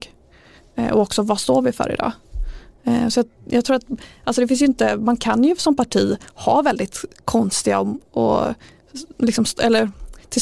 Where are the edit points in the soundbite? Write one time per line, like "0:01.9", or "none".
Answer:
none